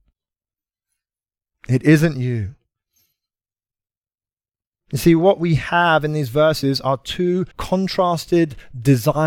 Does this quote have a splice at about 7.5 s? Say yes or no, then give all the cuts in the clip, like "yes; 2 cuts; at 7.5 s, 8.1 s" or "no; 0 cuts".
yes; 1 cut; at 7.5 s